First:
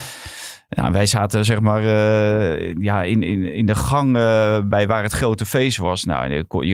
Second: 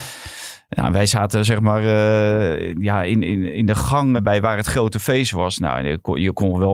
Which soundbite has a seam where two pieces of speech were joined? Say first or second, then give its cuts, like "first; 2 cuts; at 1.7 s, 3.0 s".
second; 1 cut; at 4.2 s